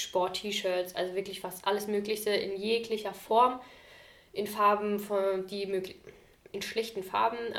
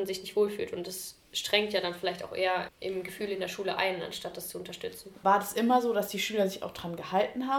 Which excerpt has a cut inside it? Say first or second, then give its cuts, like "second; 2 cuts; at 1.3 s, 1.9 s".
second; 2 cuts; at 2.7 s, 5.2 s